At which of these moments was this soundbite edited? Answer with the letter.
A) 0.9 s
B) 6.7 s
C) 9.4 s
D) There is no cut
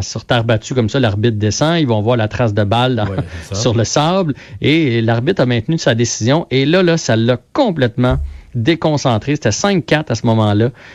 D